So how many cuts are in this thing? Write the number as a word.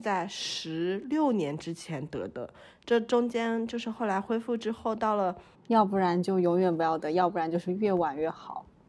one